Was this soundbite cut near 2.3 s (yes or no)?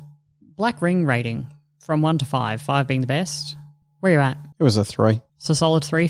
no